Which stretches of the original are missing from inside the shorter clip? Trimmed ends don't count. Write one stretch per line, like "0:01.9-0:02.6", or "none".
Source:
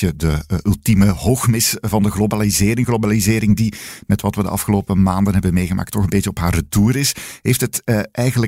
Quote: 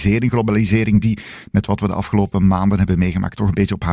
none

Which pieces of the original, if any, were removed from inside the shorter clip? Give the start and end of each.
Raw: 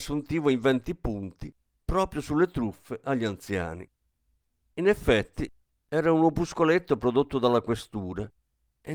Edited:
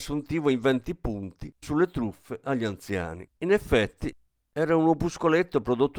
0:01.6-0:02.2
0:03.9-0:04.7

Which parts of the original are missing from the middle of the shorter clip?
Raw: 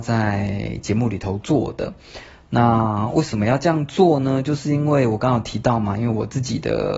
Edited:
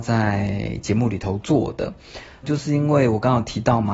0:02.4-0:04.4

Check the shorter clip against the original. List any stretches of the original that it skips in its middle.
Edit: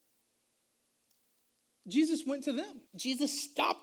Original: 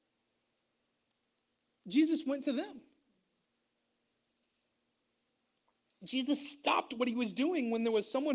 0:02.9-0:05.9

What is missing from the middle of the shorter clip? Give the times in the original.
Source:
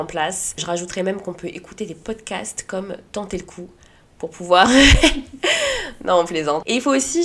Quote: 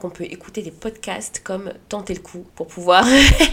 0:03.7-0:04.1

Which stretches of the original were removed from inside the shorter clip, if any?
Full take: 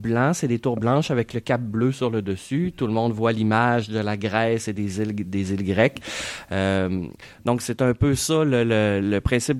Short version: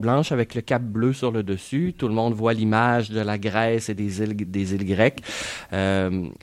none

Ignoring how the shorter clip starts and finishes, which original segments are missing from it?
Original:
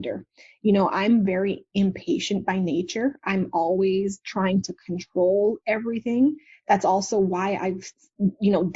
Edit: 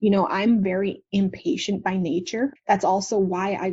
0:03.2-0:06.6

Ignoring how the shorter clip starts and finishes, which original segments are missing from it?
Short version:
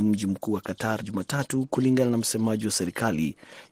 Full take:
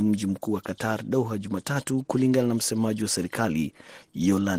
0:01.0-0:01.4

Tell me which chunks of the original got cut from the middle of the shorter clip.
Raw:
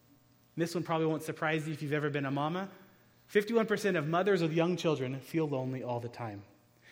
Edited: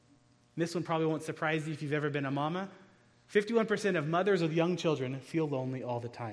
none

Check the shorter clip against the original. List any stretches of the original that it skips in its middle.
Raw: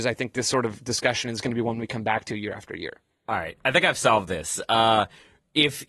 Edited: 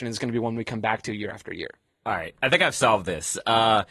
none

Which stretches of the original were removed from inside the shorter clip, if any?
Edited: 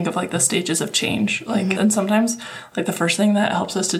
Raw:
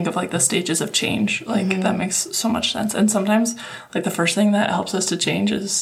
0:01.7-0:02.9

